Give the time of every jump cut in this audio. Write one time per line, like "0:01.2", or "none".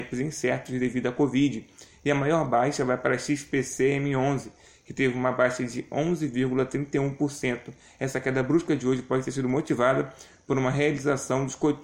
none